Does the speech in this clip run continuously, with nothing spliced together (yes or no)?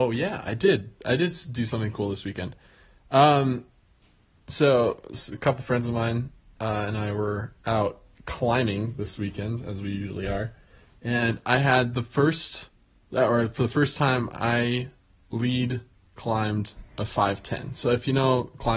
yes